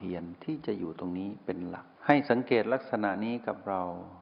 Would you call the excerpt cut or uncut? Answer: cut